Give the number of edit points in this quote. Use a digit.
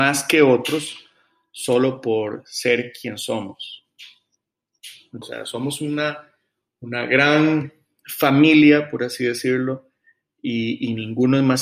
1